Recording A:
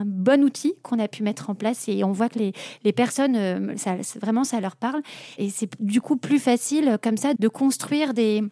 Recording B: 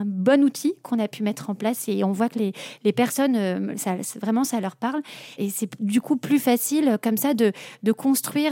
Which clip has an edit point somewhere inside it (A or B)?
A